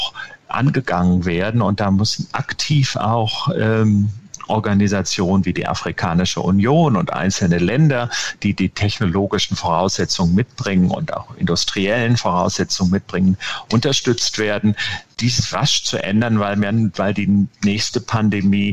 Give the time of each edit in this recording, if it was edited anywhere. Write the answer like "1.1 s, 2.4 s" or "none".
15.5 s